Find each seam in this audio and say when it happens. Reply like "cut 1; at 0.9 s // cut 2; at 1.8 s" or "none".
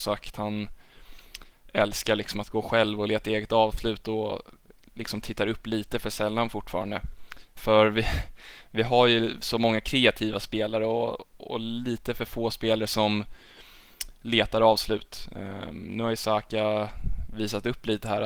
cut 1; at 7.6 s